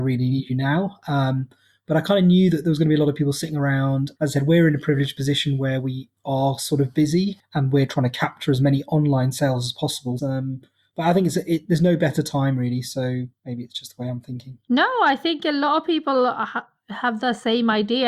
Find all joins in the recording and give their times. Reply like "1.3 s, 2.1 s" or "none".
10.2 s